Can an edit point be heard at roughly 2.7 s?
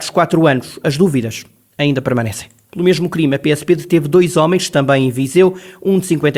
yes; 1 cut; at 2.7 s

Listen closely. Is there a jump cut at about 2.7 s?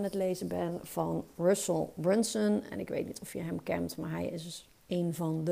no; 0 cuts

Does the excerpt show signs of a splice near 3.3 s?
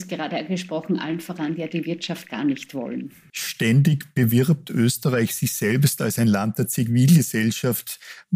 yes; 1 cut; at 3.3 s

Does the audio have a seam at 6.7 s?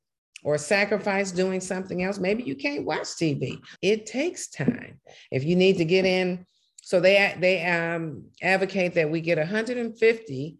no; 2 cuts; at 3.8 s, 5.3 s

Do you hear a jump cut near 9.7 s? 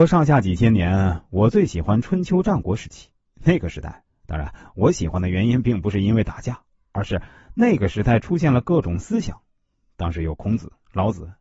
no; 1 cut; at 4.1 s

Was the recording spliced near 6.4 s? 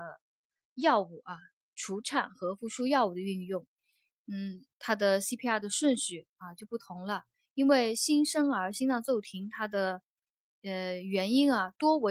no; 1 cut; at 4.7 s

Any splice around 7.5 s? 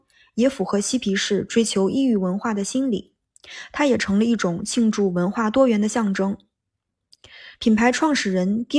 yes; 1 cut; at 7.5 s

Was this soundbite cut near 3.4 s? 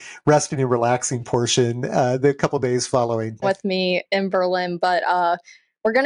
yes; 1 cut; at 3.4 s

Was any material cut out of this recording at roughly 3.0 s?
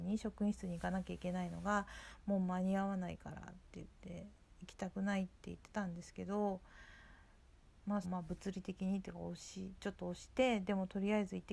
no; 1 cut; at 8.0 s

